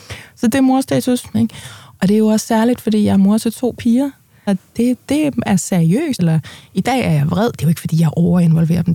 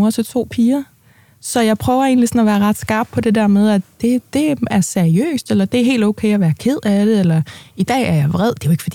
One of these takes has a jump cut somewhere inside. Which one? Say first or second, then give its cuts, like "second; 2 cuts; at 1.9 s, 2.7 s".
first; 3 cuts; at 1.3 s, 4.5 s, 6.2 s